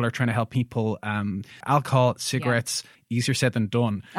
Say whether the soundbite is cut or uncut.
cut